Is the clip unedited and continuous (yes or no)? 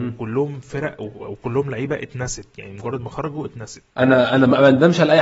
no